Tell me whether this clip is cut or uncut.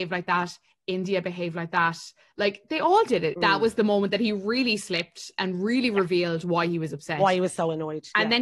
cut